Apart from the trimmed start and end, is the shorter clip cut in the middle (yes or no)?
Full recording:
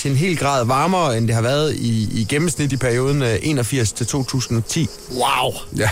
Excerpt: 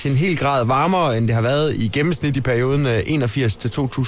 yes